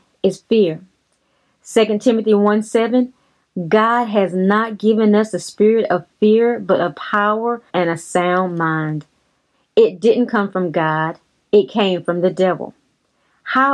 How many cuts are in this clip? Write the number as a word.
two